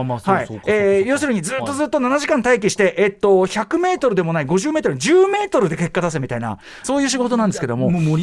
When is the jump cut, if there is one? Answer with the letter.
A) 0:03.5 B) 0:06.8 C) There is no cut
B